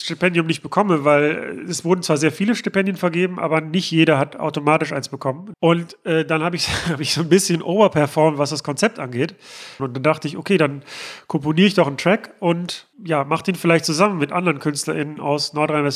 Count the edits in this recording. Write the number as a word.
three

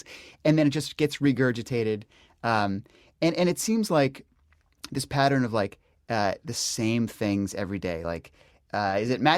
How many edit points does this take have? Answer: one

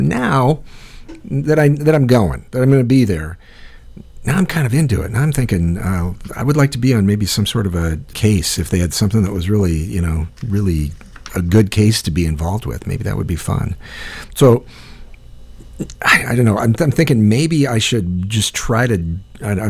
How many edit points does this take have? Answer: one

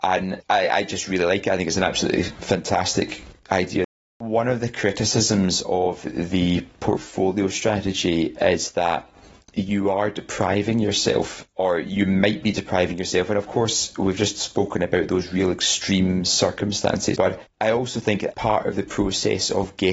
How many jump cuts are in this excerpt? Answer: two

